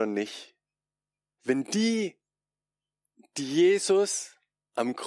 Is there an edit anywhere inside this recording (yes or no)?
yes